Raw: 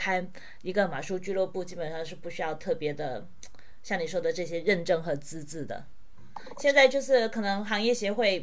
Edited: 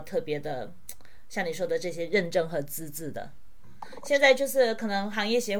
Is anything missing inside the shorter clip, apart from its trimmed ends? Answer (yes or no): no